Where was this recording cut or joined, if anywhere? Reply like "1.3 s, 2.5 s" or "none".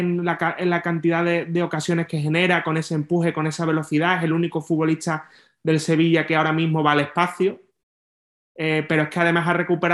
none